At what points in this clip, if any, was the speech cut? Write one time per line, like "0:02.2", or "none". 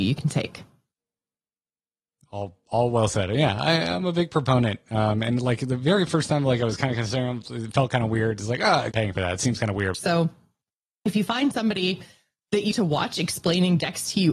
0:08.9
0:09.9
0:12.7

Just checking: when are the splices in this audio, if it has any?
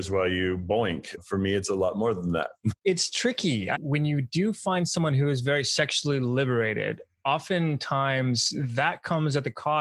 none

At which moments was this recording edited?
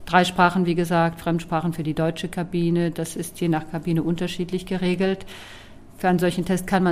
none

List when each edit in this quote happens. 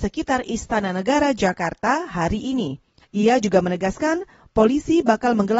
0:03.0

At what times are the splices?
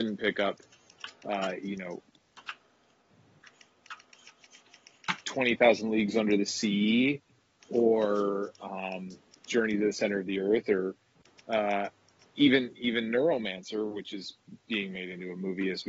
none

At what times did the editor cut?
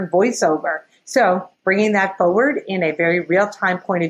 0:01.0

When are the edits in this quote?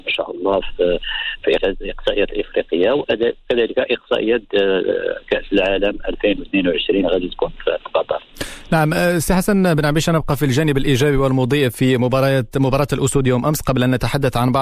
0:01.6

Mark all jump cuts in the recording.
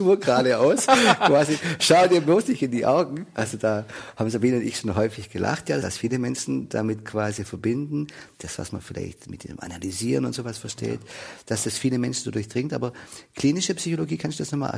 0:05.8

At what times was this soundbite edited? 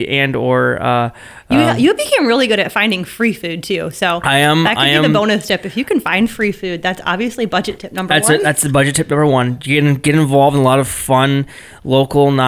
none

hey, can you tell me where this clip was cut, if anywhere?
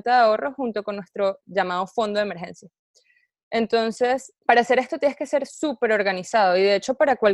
0:04.4

